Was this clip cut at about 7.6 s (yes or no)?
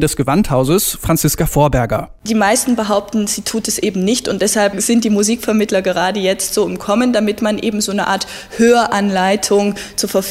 no